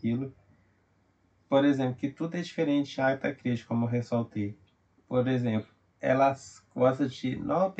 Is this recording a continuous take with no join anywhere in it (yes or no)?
yes